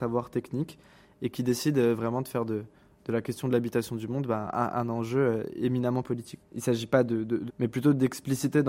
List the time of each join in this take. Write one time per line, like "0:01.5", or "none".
0:06.4
0:07.5